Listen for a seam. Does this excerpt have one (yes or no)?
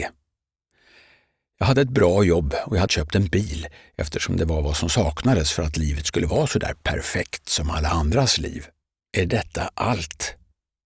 yes